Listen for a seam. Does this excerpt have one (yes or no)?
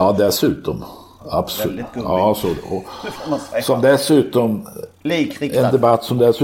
no